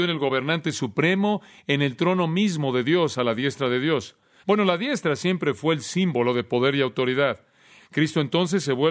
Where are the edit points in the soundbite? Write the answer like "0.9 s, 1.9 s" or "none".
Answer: 4.4 s, 7.8 s